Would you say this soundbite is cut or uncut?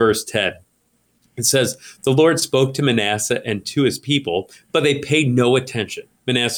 uncut